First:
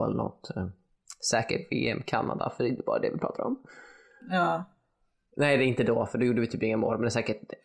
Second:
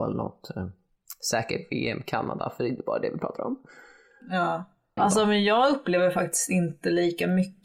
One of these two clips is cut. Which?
second; 1 cut; at 5.0 s

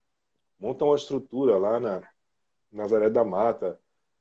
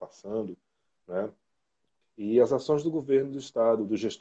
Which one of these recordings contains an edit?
second; 1 cut; at 2.0 s

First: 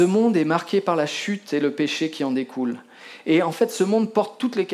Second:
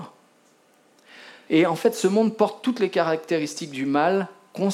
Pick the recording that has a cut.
second; 1 cut; at 1.5 s

